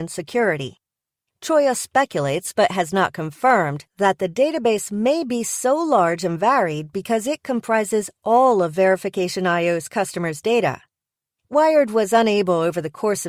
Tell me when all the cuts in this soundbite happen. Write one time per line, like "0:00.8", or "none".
0:01.3

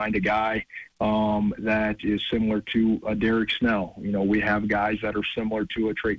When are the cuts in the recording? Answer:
none

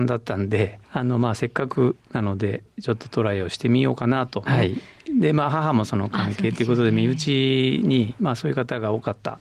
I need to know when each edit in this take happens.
0:04.5

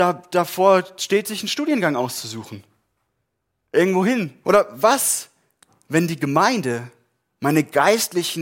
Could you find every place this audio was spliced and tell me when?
0:04.4
0:07.4

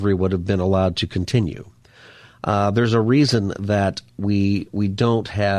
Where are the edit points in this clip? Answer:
none

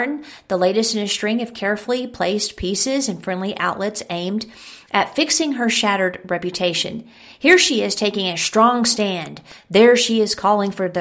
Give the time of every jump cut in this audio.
none

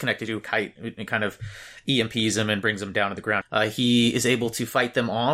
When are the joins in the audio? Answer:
0:03.4

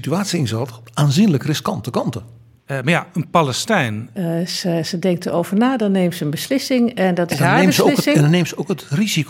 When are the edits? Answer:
0:02.6
0:04.1

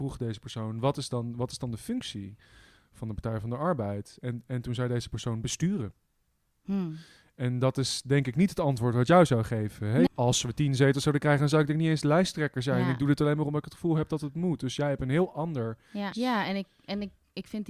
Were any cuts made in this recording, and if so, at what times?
0:10.1
0:16.1

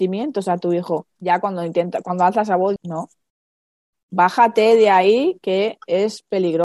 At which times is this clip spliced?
0:01.2
0:02.8

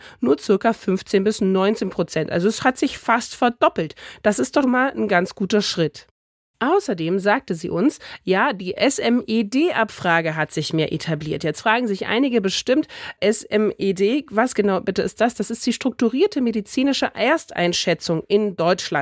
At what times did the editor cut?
0:04.6

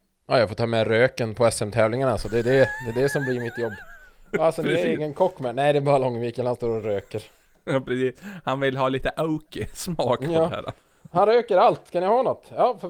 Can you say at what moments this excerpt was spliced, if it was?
none

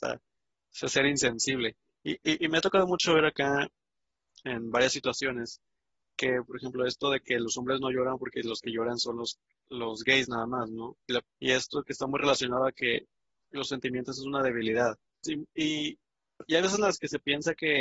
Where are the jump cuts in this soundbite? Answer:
0:11.2
0:15.2

